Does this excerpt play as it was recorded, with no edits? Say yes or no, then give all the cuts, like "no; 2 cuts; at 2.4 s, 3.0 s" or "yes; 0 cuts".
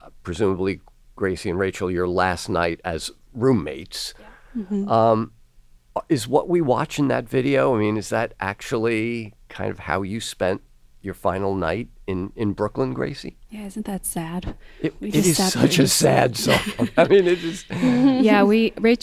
yes; 0 cuts